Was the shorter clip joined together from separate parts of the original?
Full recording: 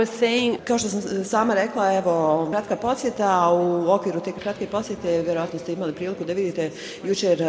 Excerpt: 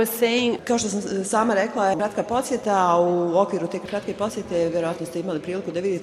yes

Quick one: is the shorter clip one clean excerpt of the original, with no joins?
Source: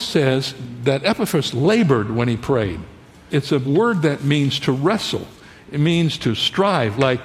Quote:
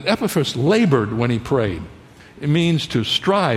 no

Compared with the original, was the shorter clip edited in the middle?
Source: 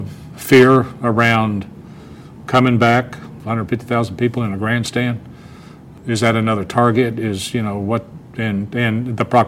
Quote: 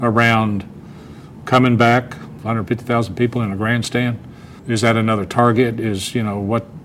yes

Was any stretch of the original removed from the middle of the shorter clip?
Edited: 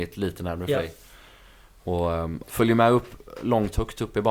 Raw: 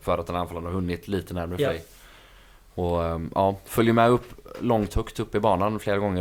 yes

